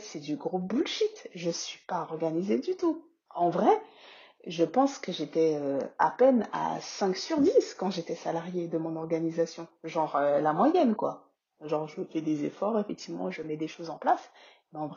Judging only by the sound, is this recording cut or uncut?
cut